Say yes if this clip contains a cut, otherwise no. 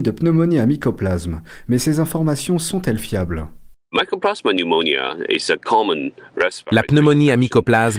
no